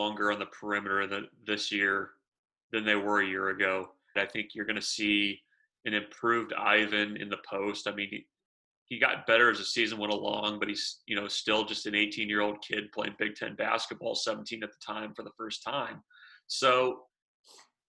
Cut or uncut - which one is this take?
cut